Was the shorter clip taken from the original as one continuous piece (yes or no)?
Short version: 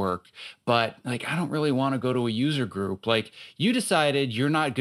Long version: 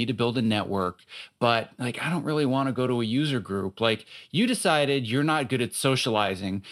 yes